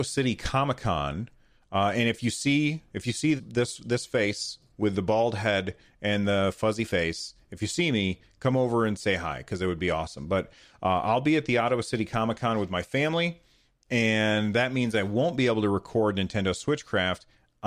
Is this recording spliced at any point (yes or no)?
yes